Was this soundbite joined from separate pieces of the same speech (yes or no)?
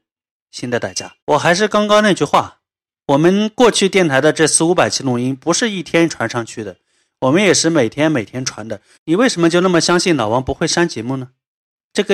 yes